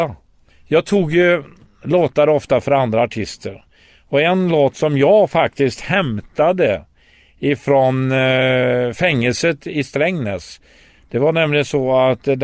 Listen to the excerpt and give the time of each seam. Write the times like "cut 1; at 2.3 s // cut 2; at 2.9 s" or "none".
none